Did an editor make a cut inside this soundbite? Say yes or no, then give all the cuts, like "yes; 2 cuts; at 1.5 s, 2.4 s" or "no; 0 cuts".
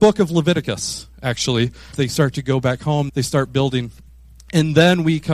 yes; 2 cuts; at 1.9 s, 3.1 s